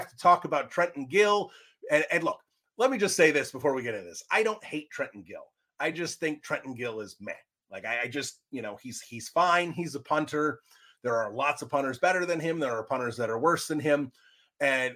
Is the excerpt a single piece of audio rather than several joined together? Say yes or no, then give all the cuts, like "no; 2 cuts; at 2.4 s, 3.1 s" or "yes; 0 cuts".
yes; 0 cuts